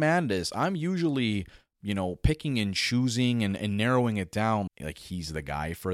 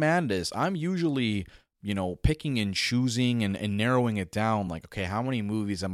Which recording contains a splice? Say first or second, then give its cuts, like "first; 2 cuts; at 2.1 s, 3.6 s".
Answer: first; 1 cut; at 4.7 s